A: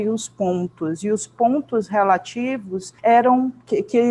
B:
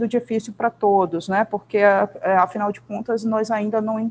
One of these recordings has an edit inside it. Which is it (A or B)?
A